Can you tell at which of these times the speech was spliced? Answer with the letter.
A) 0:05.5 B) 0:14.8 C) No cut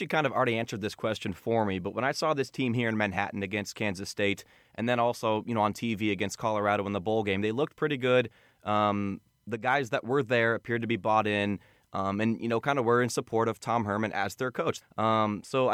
B